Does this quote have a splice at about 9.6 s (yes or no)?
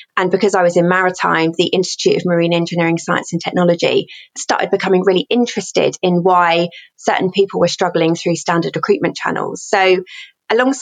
no